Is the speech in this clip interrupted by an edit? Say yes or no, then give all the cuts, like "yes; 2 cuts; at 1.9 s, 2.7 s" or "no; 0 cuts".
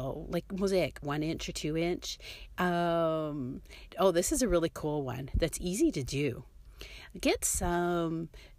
yes; 3 cuts; at 1.0 s, 2.6 s, 3.9 s